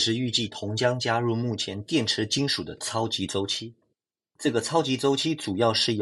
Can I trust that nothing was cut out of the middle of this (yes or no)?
yes